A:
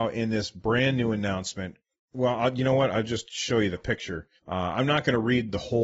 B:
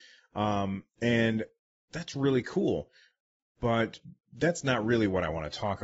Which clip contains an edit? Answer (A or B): A